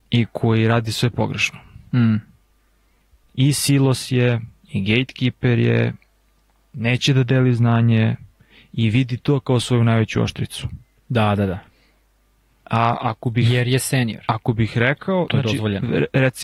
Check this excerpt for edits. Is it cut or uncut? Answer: uncut